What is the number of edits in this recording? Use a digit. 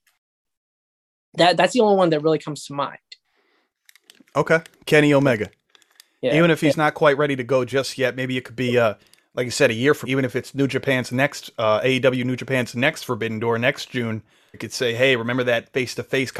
2